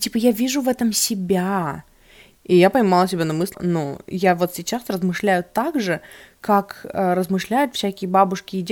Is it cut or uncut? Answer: cut